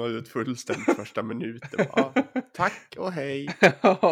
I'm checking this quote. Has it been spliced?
no; 0 cuts

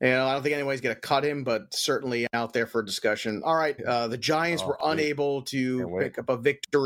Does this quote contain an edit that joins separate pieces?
yes; 1 cut; at 3.8 s

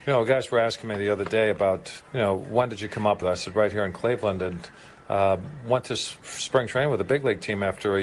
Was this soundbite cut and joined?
yes; 1 cut; at 3.2 s

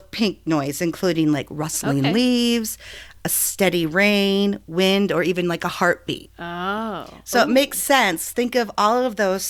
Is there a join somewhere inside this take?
no; 0 cuts

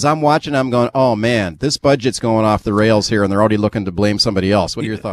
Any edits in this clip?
no; 0 cuts

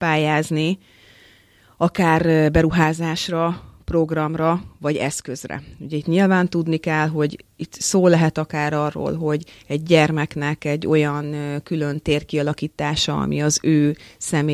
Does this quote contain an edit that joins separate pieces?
no; 0 cuts

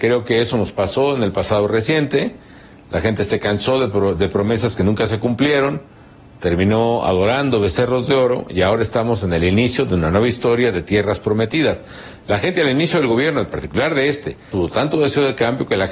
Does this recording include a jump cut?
yes; 1 cut; at 14.5 s

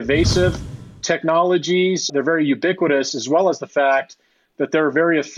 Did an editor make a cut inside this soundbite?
yes; 1 cut; at 2.1 s

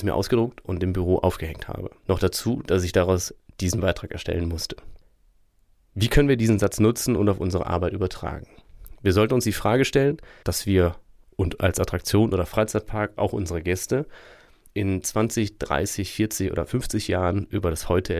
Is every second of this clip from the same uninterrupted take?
no; 1 cut; at 10.4 s

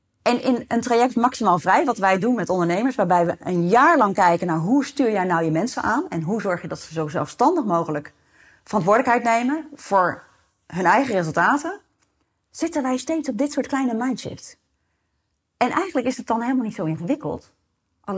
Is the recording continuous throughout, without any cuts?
yes; 0 cuts

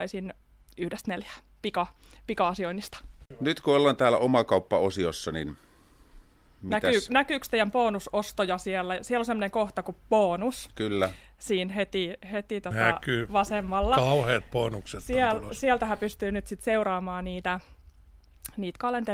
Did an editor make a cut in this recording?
no; 0 cuts

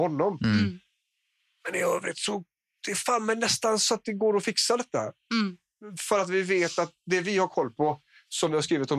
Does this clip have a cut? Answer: no; 0 cuts

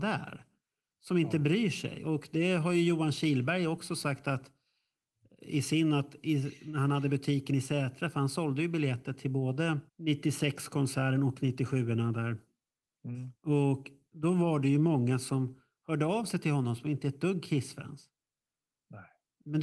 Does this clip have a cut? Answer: yes; 1 cut; at 9.9 s

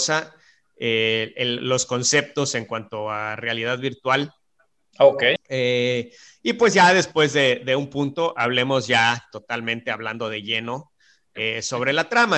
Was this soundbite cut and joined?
yes; 1 cut; at 5.4 s

